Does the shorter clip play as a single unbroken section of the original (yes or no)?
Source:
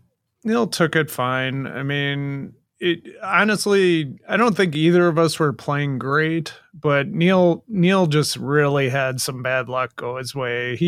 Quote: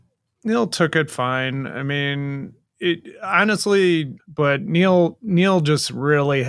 no